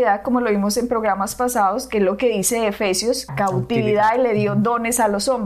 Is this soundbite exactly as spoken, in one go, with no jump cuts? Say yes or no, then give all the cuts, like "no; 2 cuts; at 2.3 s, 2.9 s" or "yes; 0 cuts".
no; 1 cut; at 3.3 s